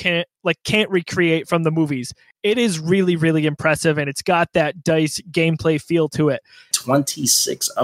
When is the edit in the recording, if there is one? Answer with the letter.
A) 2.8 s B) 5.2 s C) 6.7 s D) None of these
C